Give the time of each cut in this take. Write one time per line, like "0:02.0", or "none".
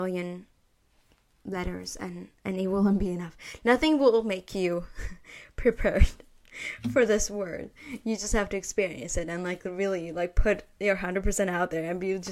none